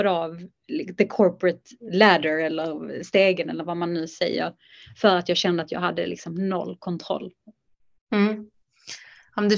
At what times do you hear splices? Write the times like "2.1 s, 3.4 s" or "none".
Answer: none